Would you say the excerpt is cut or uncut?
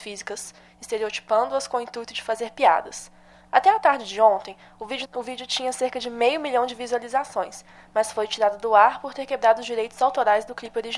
cut